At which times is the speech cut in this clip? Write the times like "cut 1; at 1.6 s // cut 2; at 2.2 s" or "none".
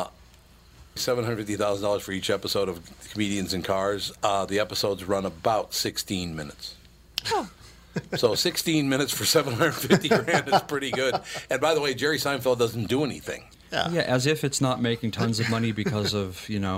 cut 1; at 1.0 s